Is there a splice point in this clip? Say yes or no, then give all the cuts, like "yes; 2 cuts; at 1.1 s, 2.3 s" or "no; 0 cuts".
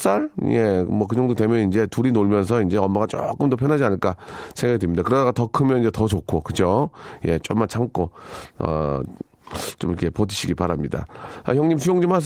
no; 0 cuts